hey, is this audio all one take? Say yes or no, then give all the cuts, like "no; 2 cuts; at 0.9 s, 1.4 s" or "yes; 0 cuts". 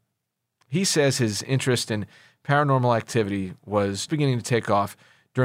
no; 1 cut; at 4.1 s